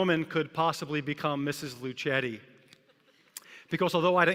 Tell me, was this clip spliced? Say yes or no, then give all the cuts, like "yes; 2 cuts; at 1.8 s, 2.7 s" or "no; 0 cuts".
no; 0 cuts